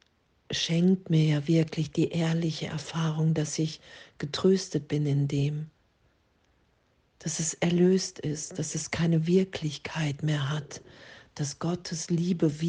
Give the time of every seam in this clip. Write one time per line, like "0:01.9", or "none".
0:07.2